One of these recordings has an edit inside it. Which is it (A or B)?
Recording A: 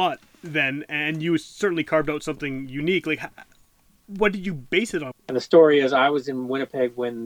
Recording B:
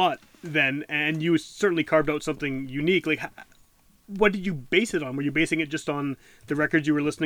A